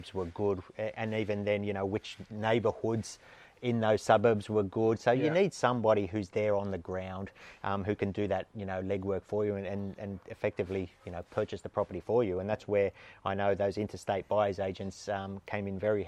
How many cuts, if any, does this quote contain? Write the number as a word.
zero